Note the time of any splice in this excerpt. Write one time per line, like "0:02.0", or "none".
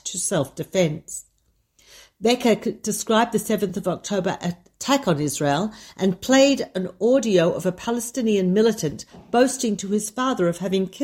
none

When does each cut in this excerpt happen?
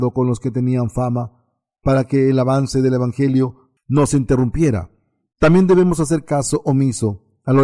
0:05.3

